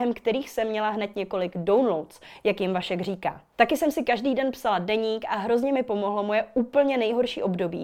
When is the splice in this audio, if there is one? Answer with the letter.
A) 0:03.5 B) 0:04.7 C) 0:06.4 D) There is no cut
A